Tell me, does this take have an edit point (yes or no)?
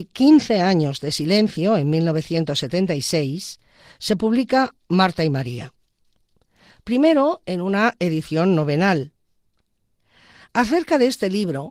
no